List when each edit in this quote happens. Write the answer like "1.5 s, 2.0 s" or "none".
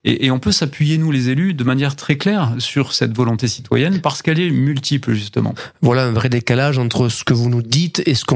none